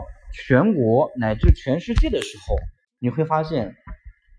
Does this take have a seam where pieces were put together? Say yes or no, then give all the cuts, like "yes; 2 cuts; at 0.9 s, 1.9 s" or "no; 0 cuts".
no; 0 cuts